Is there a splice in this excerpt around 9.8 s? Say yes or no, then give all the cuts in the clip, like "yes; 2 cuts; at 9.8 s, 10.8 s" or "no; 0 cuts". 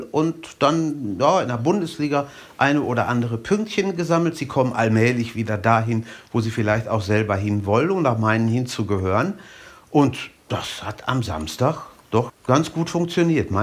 no; 1 cut; at 12.3 s